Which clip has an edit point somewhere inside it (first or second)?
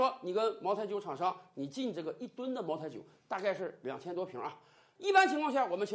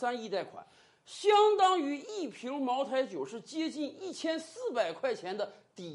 first